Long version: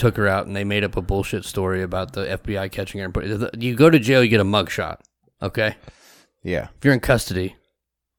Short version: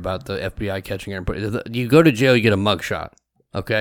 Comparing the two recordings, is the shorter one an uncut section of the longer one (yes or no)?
yes